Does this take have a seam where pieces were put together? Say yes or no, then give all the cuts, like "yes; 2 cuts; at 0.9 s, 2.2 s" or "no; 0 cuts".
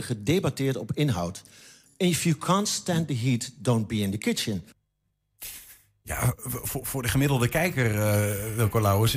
no; 0 cuts